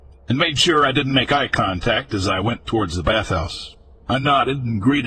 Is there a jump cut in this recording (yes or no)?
no